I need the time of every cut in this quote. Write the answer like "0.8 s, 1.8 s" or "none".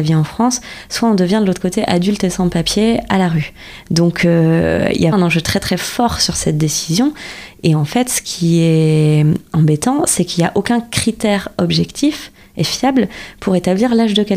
5.1 s